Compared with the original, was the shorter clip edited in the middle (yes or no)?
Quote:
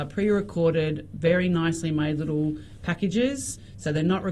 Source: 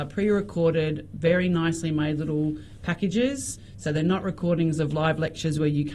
no